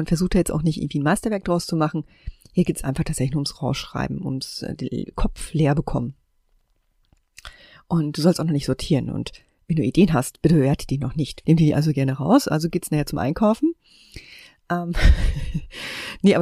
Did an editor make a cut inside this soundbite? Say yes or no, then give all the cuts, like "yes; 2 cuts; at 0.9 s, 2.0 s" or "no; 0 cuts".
yes; 1 cut; at 11.4 s